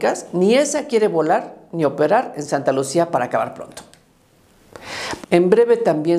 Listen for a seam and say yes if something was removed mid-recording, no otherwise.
yes